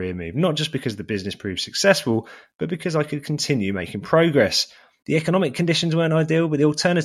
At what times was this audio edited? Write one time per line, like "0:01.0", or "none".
0:05.0

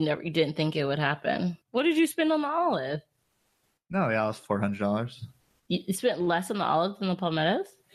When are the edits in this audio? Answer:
0:01.6

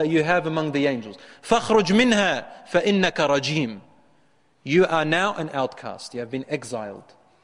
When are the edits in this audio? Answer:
none

